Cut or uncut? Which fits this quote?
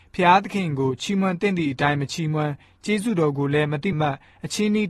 cut